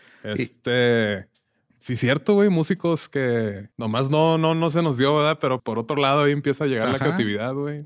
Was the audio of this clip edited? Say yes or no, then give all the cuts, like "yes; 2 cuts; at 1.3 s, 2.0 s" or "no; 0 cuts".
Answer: yes; 2 cuts; at 3.7 s, 5.6 s